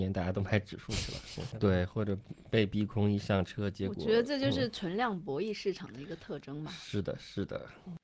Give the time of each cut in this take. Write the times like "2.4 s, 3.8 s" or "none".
1.5 s